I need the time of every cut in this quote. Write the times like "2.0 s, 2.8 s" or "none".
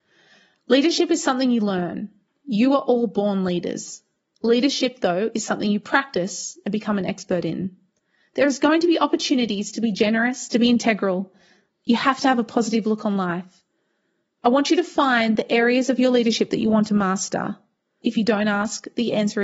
10.5 s, 18.0 s

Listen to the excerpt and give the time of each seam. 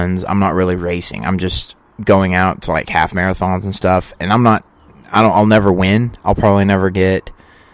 none

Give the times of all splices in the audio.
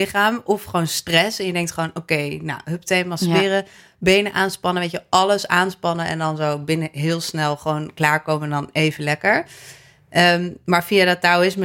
none

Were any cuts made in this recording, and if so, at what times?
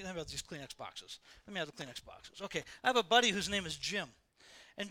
1.4 s

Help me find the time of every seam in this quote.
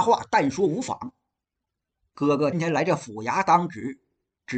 2.5 s

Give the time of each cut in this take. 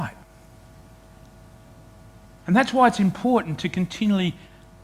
2.4 s

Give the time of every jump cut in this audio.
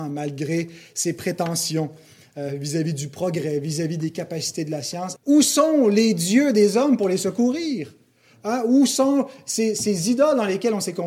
5.2 s

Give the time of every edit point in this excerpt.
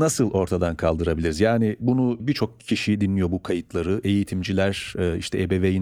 none

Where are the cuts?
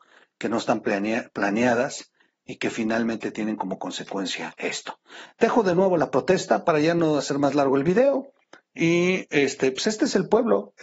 none

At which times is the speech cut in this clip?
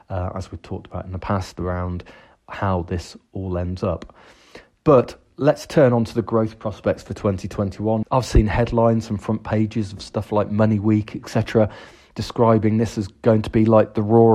8.0 s

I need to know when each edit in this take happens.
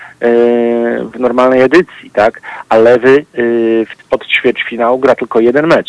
none

